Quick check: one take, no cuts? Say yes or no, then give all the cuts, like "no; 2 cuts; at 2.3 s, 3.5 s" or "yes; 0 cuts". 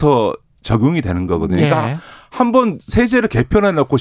yes; 0 cuts